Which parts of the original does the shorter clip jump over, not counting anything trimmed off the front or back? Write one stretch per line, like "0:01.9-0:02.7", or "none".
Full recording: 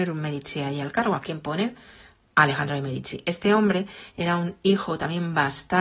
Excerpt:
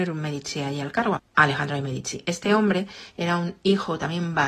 0:01.2-0:02.2